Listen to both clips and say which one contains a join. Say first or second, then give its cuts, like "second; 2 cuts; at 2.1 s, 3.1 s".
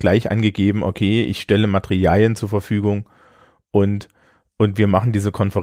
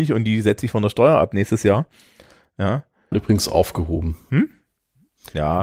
second; 1 cut; at 3.1 s